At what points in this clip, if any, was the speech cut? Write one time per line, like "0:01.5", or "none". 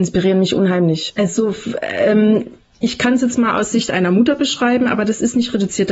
0:01.1